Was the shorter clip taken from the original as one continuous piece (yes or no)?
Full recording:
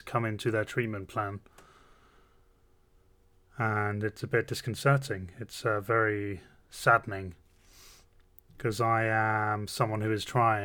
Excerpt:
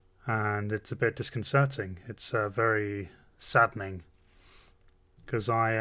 yes